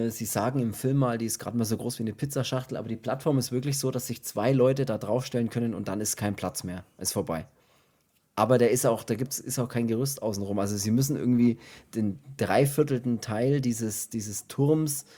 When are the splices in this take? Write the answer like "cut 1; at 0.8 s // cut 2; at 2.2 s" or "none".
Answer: none